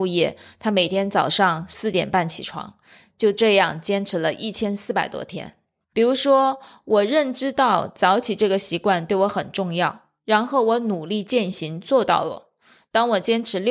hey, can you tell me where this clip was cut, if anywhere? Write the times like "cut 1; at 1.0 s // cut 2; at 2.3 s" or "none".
cut 1; at 5.9 s